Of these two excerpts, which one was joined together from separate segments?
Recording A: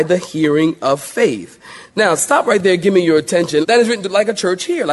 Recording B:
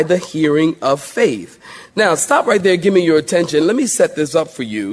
A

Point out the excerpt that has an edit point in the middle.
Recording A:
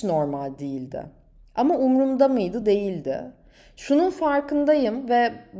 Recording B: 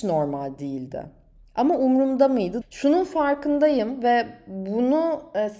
B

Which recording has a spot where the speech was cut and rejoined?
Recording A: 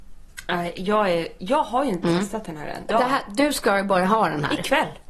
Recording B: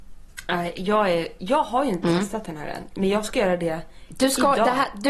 A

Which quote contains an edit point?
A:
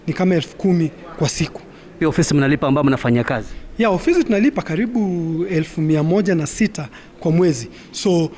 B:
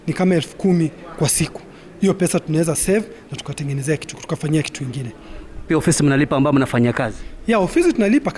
A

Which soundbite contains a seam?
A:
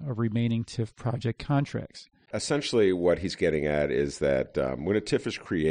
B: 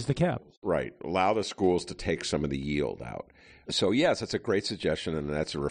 A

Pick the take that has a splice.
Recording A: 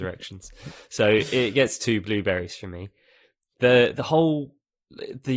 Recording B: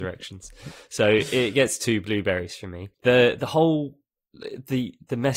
B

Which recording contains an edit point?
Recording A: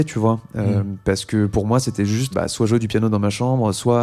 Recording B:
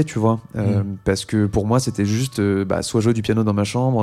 A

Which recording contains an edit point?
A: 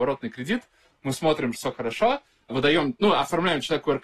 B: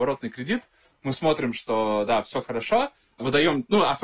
A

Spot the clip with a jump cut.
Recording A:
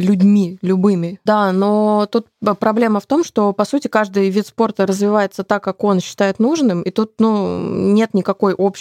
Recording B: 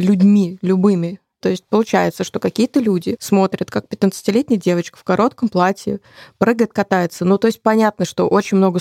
A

